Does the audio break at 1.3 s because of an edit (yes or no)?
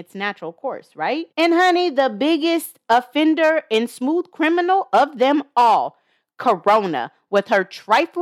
yes